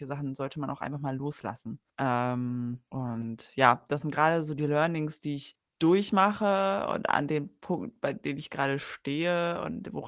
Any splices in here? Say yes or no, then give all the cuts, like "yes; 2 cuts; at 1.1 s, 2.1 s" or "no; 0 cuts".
no; 0 cuts